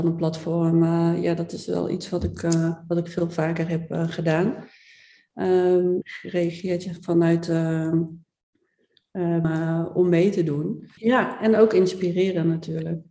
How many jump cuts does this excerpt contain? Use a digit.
3